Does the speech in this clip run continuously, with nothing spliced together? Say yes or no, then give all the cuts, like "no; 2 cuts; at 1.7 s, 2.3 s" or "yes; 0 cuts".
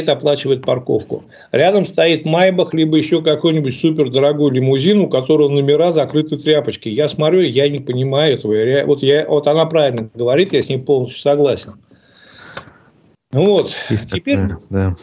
yes; 0 cuts